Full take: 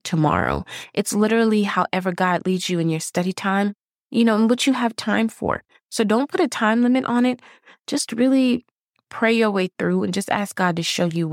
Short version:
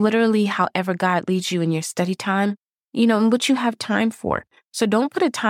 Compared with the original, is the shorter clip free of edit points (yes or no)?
yes